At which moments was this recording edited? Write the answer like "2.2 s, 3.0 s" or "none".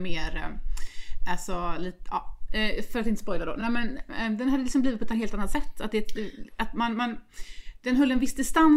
none